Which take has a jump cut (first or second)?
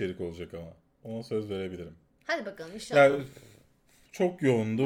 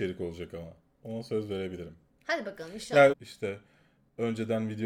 second